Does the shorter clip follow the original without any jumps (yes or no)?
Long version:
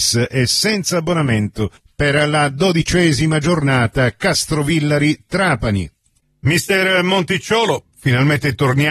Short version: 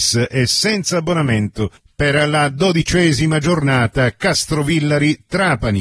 yes